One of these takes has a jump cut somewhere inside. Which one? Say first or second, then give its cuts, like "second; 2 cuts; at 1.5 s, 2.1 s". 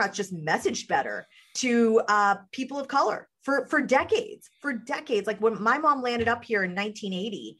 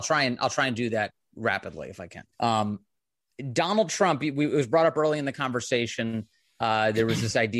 second; 1 cut; at 2.3 s